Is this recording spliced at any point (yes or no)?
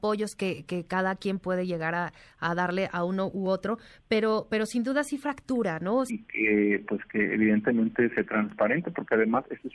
yes